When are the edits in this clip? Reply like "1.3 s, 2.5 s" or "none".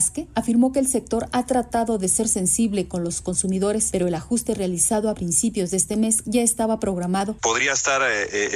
none